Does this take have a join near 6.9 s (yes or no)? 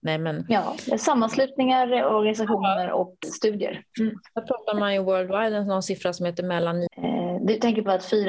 yes